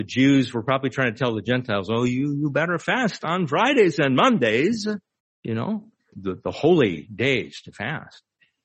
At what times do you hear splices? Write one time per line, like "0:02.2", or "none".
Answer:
0:06.1